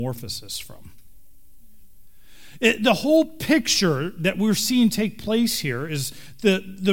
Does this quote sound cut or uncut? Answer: uncut